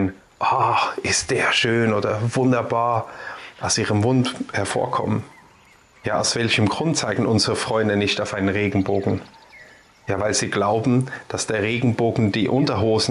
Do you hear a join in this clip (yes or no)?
no